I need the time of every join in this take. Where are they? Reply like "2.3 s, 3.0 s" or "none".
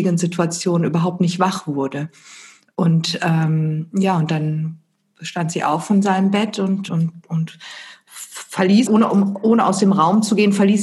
6.9 s, 8.9 s